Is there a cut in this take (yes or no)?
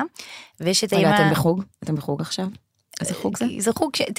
no